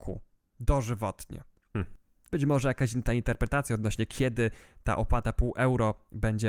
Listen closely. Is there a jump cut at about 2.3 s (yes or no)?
yes